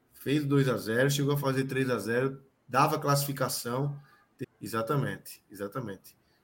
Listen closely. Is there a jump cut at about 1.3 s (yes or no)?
no